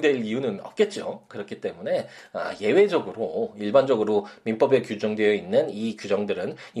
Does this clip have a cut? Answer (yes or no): no